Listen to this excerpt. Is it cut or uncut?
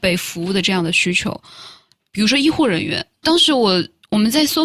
cut